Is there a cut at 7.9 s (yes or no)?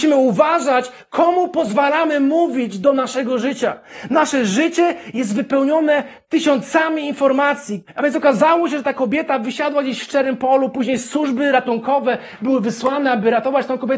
yes